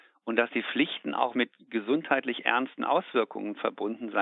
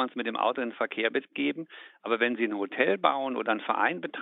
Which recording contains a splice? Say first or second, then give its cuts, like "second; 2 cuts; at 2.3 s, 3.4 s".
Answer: first; 1 cut; at 1.3 s